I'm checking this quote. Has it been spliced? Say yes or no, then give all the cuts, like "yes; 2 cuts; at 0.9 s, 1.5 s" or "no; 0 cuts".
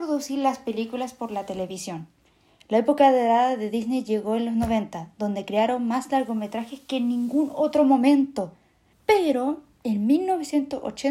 yes; 1 cut; at 8.9 s